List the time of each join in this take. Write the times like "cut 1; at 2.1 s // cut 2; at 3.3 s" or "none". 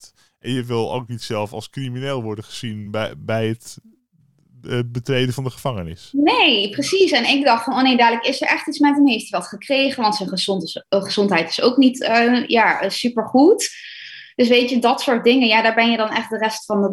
none